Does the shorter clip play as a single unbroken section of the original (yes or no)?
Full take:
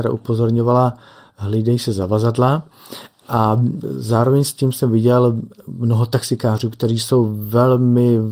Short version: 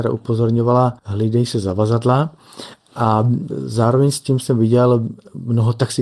no